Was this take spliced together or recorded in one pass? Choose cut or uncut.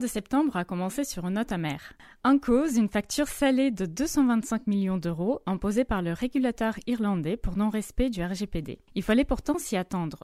uncut